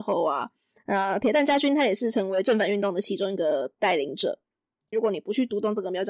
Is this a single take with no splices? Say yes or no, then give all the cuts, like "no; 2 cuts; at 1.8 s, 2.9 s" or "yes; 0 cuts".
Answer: no; 1 cut; at 4.9 s